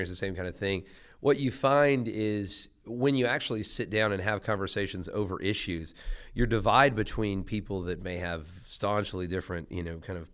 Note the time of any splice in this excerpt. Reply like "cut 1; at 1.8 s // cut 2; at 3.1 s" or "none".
none